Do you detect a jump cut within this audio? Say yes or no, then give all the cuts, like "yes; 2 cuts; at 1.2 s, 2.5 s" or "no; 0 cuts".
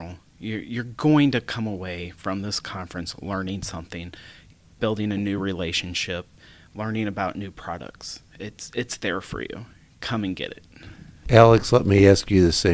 no; 0 cuts